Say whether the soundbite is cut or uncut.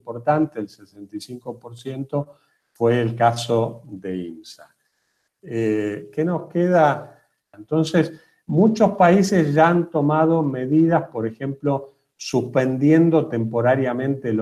cut